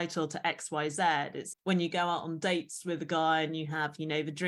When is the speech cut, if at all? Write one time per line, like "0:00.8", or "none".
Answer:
0:01.5